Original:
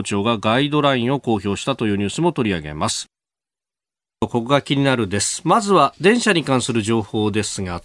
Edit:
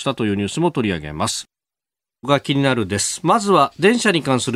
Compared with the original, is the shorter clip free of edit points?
no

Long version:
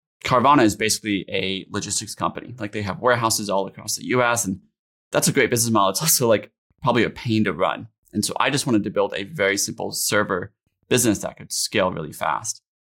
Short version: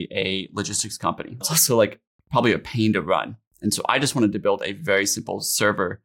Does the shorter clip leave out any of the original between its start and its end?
yes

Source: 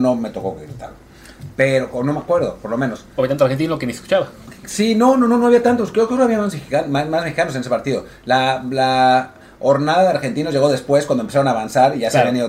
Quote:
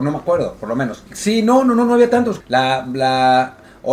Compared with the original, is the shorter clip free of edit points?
no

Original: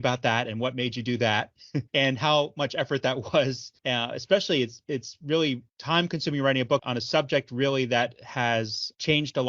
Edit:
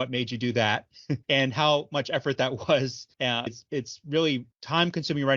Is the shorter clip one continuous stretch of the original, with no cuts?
no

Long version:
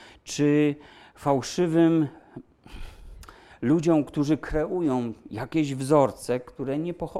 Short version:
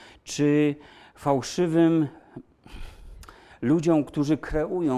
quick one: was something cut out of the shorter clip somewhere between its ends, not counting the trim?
no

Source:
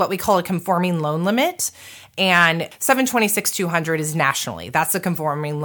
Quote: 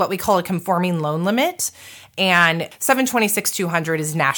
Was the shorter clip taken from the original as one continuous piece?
yes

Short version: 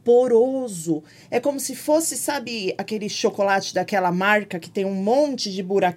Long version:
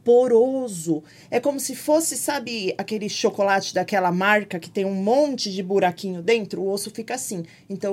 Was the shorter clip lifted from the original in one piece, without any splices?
yes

